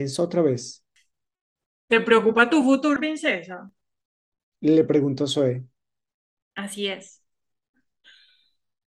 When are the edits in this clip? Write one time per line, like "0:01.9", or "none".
0:03.0